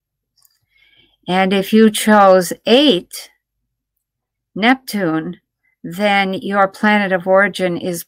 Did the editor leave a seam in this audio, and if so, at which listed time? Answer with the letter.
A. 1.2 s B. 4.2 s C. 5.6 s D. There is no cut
D